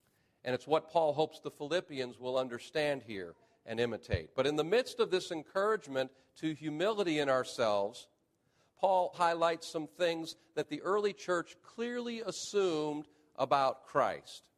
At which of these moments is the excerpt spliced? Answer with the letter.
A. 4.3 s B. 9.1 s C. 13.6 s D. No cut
B